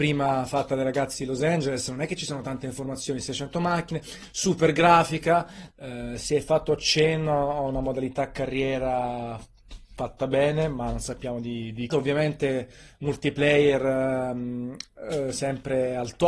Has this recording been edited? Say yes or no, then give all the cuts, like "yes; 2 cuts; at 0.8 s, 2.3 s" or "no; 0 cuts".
yes; 2 cuts; at 5.7 s, 11.9 s